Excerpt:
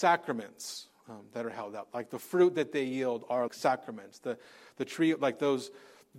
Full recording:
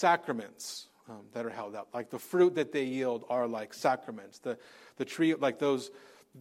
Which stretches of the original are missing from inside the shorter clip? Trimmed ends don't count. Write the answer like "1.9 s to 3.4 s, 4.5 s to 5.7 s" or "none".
3.5 s to 3.7 s